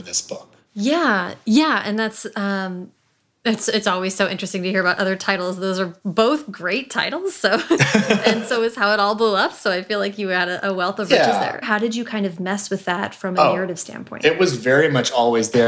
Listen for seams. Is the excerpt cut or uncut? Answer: cut